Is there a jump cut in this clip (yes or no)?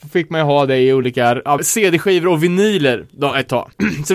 yes